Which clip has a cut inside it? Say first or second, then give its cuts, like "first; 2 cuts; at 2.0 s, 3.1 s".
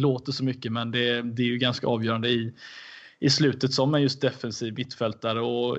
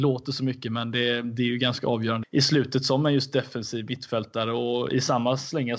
second; 1 cut; at 2.2 s